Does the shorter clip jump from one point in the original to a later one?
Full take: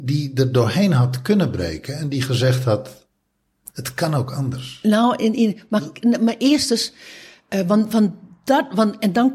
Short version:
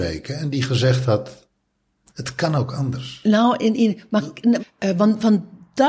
yes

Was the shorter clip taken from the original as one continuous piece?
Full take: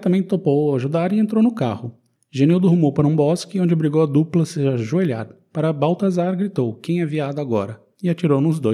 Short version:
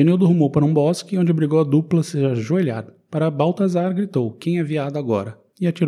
yes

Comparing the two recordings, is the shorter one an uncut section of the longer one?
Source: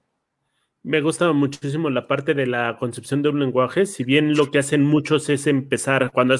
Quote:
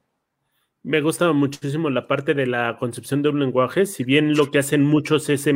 yes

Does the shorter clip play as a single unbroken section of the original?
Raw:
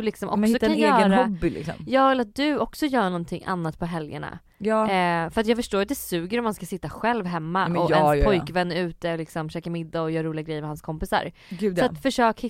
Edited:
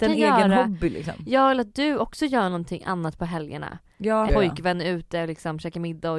no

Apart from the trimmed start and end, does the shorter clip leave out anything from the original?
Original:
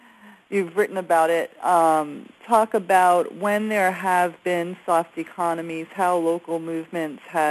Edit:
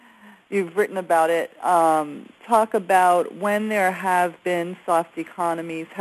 no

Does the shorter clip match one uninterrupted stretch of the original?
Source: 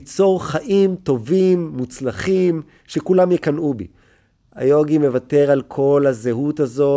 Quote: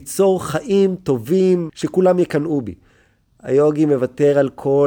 no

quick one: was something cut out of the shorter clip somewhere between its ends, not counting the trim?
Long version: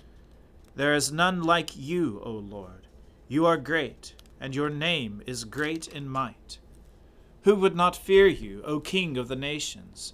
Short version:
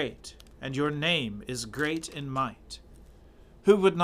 no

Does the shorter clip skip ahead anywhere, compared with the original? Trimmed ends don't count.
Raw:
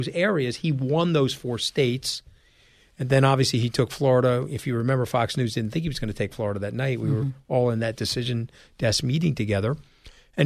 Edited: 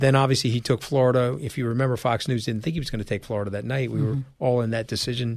no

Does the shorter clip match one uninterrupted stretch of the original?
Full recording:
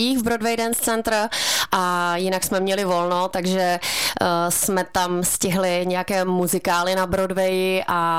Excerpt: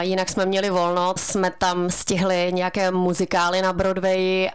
no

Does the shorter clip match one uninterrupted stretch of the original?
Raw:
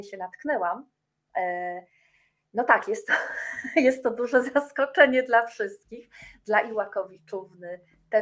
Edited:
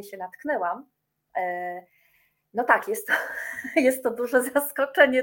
yes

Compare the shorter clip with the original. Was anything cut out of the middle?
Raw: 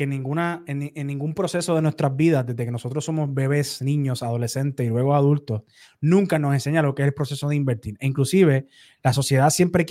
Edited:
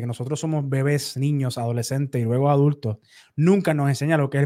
no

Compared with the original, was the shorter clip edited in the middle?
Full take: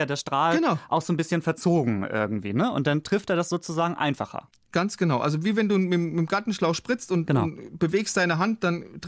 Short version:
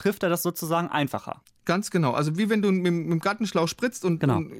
no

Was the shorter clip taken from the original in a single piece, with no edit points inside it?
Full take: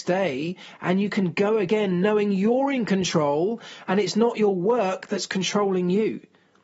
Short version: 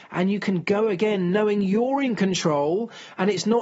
yes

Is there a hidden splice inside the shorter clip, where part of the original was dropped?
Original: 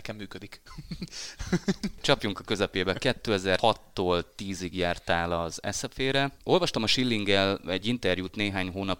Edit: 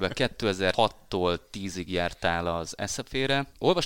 no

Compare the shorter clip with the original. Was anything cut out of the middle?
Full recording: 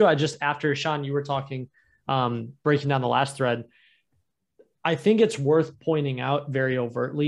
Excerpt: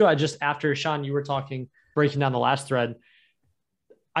yes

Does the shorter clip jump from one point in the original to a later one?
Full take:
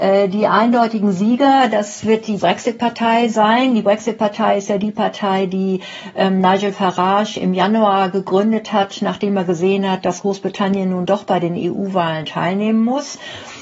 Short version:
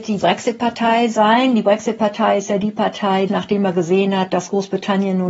yes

